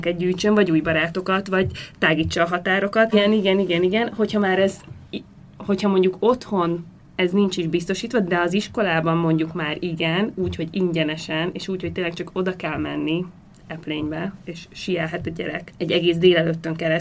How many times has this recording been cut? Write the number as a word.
one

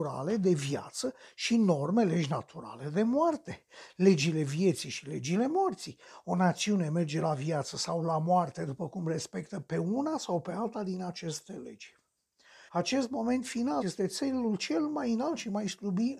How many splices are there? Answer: two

